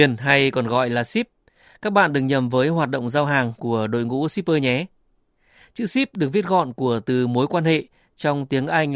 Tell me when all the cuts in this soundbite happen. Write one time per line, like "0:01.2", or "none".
none